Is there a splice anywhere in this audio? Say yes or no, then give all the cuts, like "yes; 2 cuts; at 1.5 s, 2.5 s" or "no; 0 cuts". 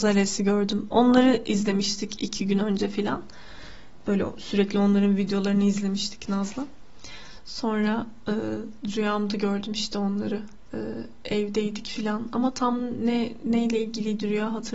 no; 0 cuts